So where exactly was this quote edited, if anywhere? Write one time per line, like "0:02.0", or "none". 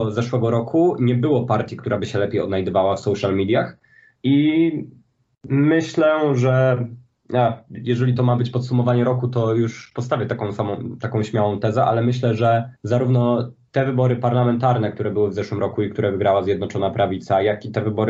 0:04.2
0:12.8